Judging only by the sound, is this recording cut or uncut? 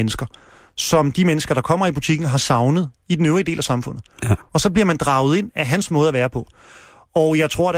uncut